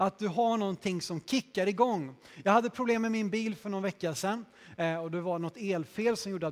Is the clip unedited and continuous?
yes; 0 cuts

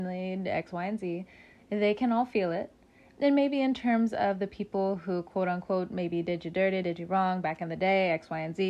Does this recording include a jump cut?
no; 0 cuts

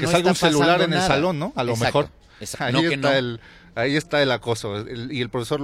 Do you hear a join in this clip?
yes; 1 cut; at 2.5 s

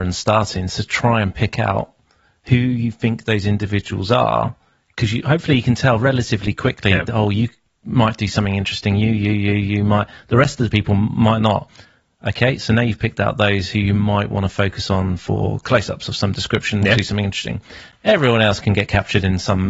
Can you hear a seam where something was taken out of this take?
no; 0 cuts

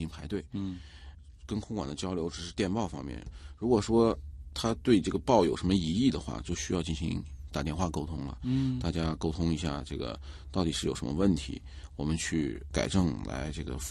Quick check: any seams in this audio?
no; 0 cuts

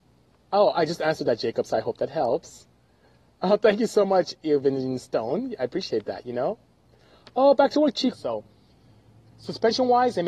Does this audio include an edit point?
yes; 1 cut; at 8.1 s

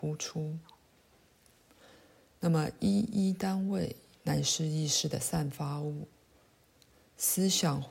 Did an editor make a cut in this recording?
no; 0 cuts

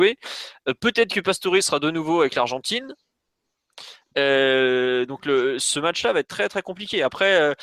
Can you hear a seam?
yes; 1 cut; at 6.5 s

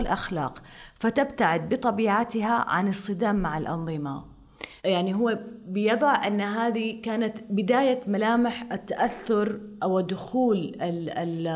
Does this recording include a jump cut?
yes; 1 cut; at 4.8 s

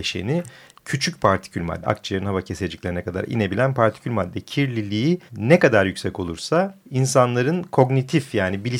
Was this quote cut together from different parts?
yes; 3 cuts; at 1.8 s, 5.3 s, 6.8 s

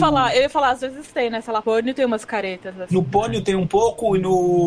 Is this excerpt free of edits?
no; 1 cut; at 1.6 s

